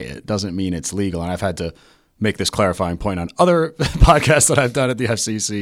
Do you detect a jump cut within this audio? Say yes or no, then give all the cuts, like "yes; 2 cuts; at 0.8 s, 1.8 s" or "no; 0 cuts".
no; 0 cuts